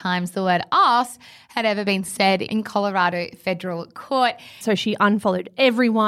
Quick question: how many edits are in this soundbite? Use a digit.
1